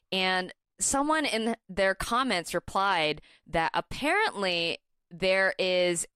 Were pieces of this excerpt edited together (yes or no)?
no